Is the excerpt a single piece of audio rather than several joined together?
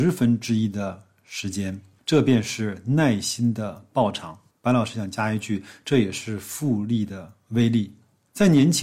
yes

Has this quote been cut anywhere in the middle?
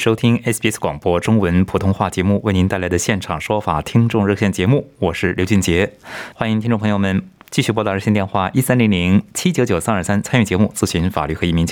yes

